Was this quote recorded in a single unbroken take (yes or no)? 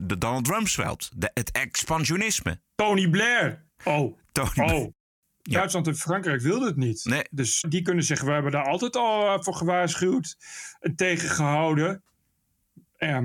no